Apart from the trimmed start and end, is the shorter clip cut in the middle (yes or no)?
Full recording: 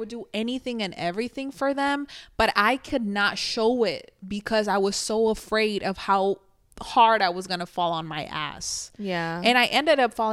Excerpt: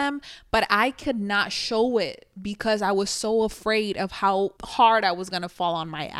yes